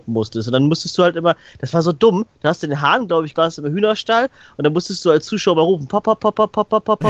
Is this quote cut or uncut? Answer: cut